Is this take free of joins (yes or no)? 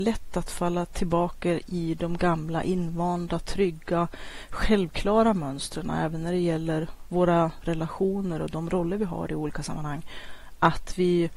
yes